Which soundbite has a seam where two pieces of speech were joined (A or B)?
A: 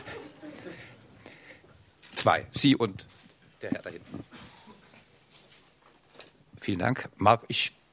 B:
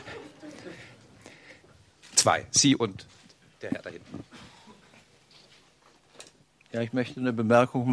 A